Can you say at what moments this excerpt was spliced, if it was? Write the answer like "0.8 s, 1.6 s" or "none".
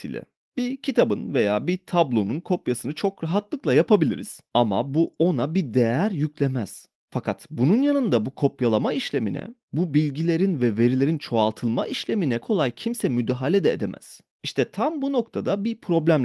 12.4 s